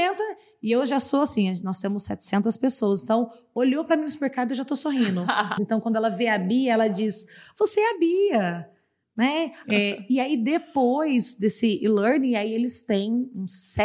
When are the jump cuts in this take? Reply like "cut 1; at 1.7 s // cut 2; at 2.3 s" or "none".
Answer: cut 1; at 5.6 s // cut 2; at 9.6 s